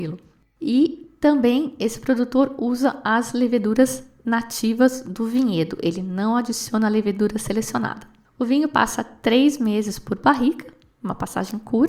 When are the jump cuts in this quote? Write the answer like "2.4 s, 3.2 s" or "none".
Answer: none